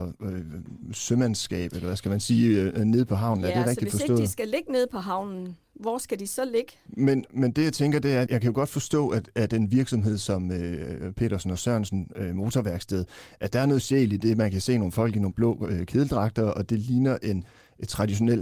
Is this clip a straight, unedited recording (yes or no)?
no